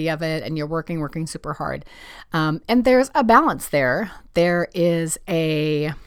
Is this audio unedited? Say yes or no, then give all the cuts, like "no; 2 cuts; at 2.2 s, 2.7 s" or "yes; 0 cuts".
yes; 0 cuts